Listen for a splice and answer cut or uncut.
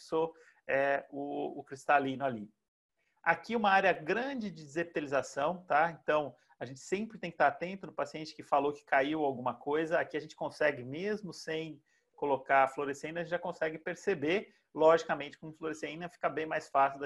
uncut